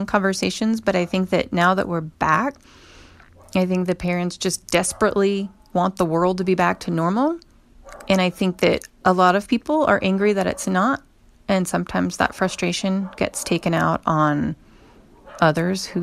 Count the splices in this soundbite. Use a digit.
0